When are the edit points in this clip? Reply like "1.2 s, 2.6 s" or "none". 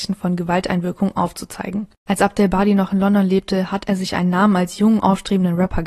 none